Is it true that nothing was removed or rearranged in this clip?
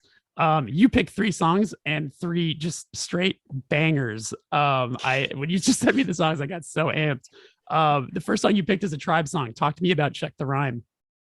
yes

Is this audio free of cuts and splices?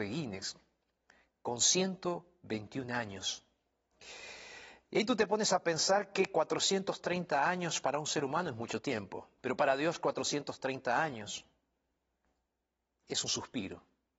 no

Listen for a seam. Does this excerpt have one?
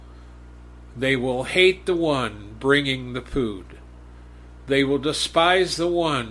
no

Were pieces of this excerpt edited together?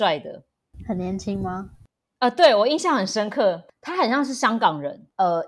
no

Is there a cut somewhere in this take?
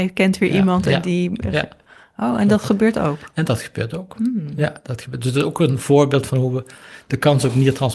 no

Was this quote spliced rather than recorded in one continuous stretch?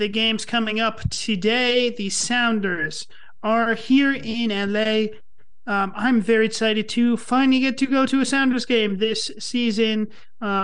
no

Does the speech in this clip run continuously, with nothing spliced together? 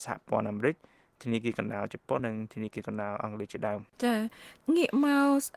no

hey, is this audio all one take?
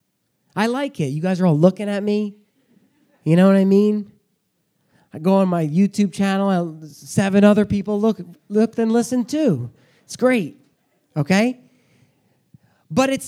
yes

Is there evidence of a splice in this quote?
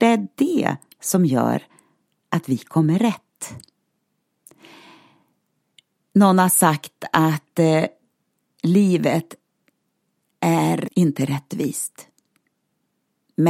yes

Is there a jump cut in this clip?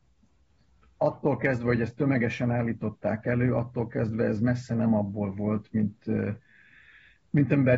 no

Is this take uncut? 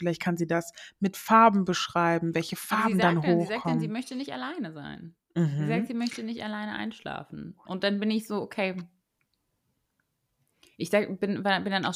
yes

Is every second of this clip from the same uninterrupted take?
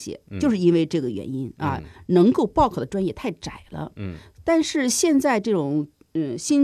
yes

